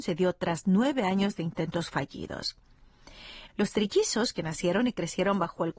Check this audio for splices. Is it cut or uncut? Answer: cut